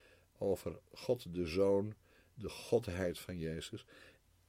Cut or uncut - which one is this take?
cut